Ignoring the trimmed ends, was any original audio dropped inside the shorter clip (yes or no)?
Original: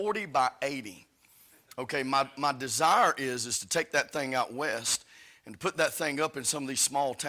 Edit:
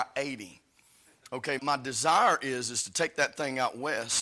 yes